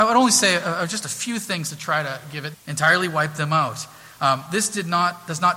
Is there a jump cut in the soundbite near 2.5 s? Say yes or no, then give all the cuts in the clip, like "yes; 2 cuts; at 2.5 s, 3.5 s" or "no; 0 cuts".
yes; 1 cut; at 2.5 s